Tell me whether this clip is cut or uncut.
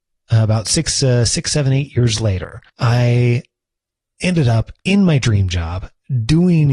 cut